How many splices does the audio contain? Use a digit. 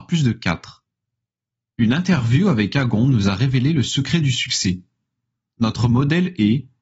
0